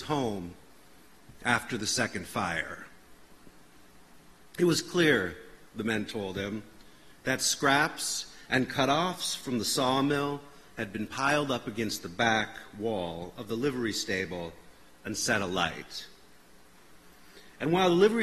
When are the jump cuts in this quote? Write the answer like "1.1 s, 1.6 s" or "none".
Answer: none